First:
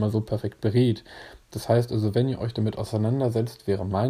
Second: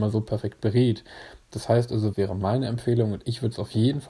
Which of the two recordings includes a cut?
second; 1 cut; at 2.1 s

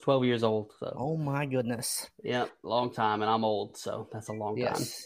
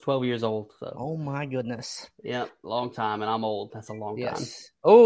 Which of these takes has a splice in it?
second; 1 cut; at 3.7 s

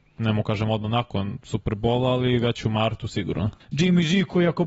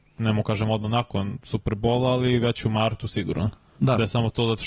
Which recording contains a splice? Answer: first; 1 cut; at 3.6 s

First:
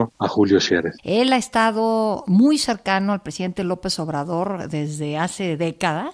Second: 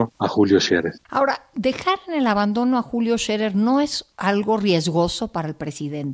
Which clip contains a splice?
first; 1 cut; at 1.0 s

